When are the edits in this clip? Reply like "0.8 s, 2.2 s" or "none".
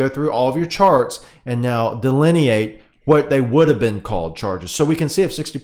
none